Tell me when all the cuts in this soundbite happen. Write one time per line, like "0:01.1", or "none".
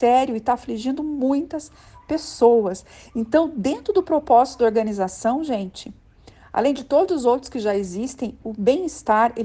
none